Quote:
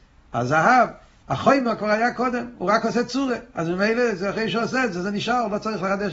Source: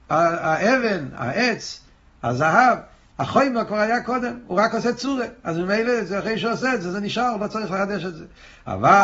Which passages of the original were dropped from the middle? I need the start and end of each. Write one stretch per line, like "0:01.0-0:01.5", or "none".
none